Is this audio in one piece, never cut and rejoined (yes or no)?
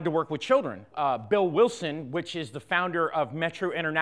no